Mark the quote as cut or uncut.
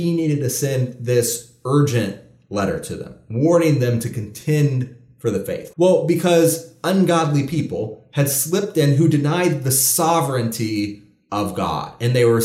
cut